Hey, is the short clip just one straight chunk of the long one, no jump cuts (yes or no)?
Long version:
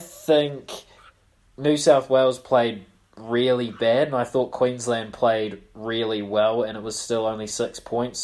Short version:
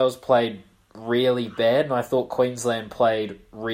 yes